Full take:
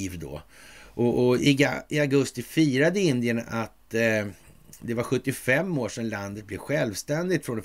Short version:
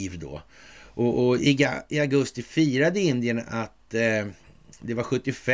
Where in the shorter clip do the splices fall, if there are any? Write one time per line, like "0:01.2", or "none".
none